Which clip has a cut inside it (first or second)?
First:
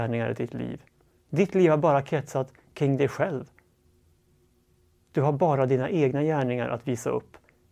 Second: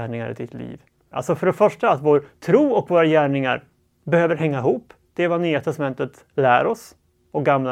second